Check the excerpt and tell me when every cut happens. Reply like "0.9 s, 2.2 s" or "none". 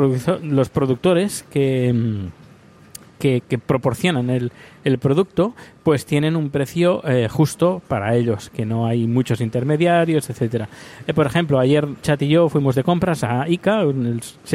12.0 s